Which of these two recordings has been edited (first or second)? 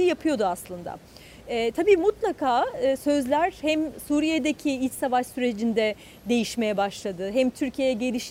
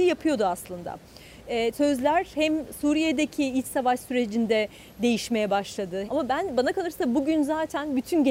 second